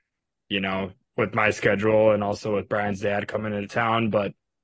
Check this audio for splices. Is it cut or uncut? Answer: uncut